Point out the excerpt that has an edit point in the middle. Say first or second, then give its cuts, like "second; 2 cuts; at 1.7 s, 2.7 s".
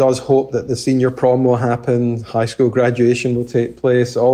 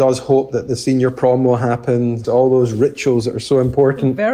second; 1 cut; at 2.2 s